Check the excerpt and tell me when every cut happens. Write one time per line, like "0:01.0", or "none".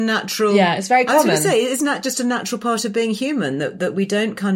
none